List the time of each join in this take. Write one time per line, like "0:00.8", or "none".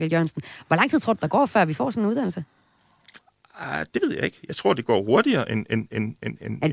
none